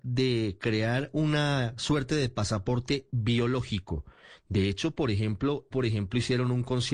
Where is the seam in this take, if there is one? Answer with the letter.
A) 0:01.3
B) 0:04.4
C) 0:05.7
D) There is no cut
C